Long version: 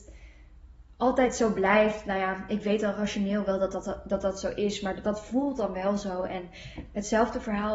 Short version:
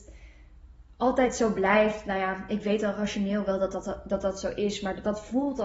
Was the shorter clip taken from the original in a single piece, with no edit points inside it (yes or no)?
yes